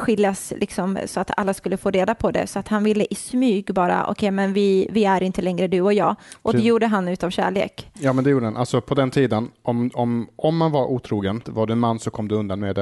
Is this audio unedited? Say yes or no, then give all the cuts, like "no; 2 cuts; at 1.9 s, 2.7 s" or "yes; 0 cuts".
no; 1 cut; at 11.4 s